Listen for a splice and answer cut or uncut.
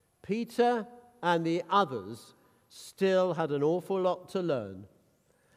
uncut